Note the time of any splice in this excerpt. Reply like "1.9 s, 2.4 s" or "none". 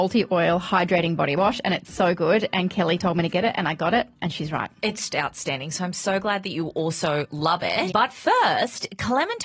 5.1 s, 7.9 s

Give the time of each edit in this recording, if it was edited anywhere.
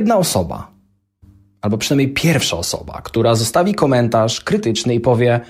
none

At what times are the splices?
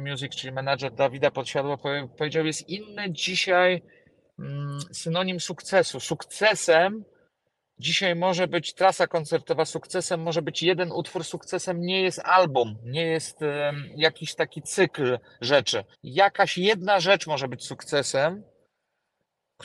15.9 s

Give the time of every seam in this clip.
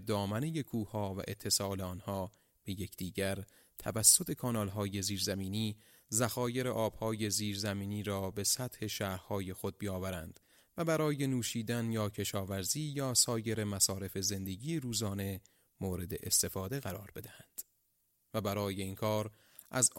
18.2 s

